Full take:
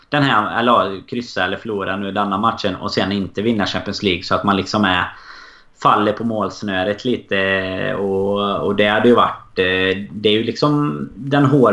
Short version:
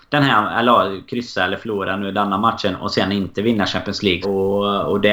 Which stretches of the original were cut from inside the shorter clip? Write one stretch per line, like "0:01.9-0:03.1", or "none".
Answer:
0:04.2-0:08.0